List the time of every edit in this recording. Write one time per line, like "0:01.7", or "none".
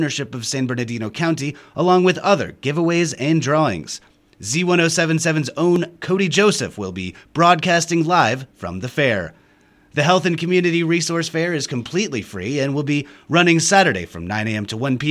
none